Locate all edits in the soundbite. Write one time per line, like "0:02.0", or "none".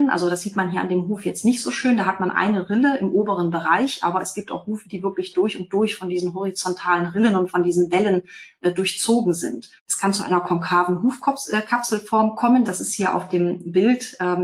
0:09.8
0:12.6